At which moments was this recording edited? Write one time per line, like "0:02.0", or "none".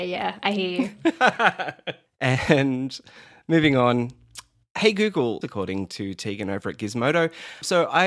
0:05.4